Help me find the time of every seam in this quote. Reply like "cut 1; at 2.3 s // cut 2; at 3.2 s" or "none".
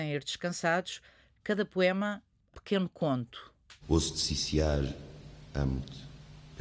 cut 1; at 2.5 s // cut 2; at 3.8 s